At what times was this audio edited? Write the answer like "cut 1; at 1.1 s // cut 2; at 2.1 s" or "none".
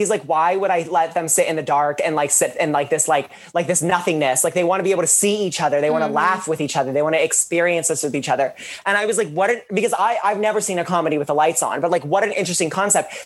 none